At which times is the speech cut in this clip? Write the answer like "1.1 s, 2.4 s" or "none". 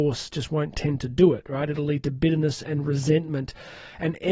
none